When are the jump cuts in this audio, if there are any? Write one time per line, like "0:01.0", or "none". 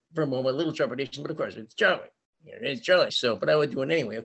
0:03.1